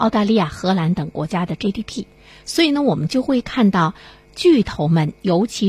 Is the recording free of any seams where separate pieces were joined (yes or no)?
yes